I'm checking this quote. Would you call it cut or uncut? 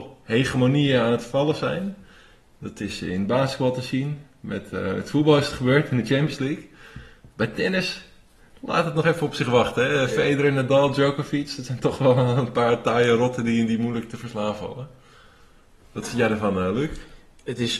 uncut